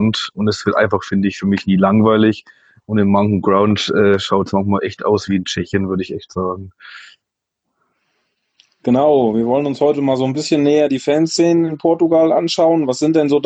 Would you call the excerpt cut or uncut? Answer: uncut